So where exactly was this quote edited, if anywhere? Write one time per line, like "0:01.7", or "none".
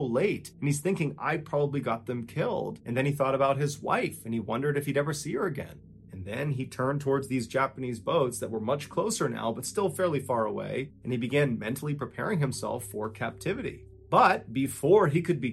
none